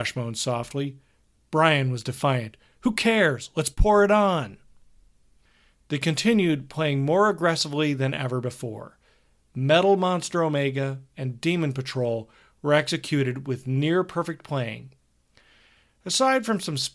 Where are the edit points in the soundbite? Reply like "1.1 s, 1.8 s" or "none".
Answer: none